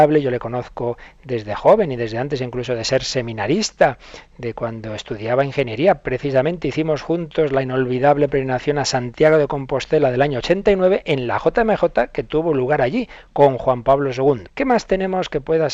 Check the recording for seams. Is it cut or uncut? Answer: cut